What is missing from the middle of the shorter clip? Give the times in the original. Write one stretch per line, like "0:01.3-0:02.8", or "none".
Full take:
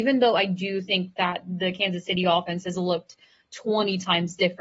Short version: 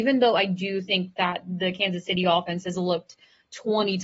none